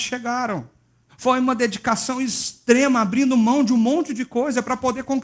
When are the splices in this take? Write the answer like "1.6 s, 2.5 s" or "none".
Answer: 1.0 s